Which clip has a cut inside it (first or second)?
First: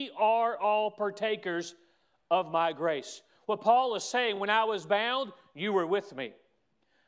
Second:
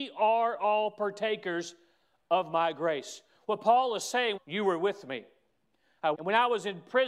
second